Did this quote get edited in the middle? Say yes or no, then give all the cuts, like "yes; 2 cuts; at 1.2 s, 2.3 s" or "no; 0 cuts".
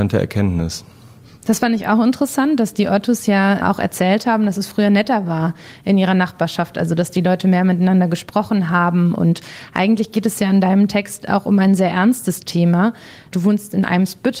no; 0 cuts